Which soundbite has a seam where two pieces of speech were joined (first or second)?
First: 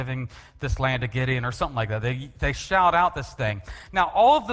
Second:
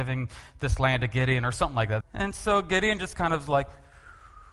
second